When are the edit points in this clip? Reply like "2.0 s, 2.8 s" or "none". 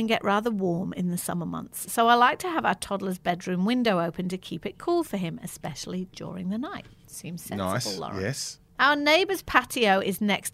none